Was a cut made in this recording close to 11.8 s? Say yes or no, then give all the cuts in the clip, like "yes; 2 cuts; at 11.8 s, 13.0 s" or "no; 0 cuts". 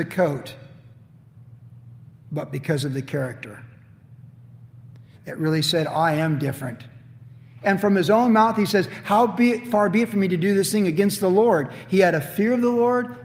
no; 2 cuts; at 5.1 s, 7.6 s